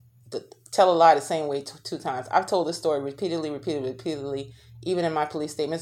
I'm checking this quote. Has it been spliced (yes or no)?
no